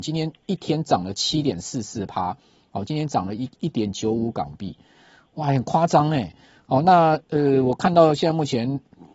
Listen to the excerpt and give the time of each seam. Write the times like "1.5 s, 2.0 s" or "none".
none